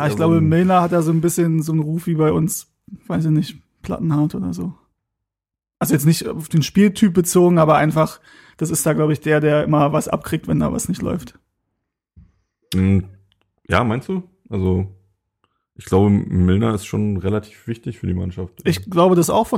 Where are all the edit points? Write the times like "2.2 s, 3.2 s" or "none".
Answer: none